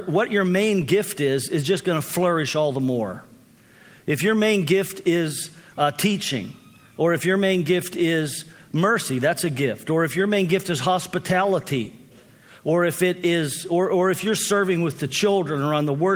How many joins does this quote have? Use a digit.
0